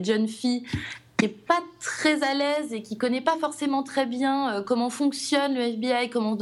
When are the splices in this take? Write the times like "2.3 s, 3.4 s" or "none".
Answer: none

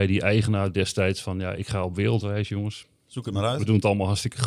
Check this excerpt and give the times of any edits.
none

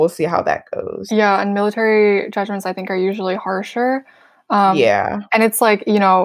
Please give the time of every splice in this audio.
none

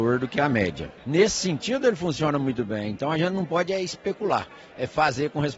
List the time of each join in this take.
1.0 s

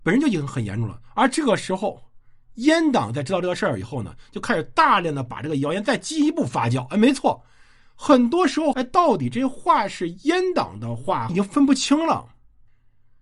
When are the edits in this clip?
8.7 s, 11.3 s

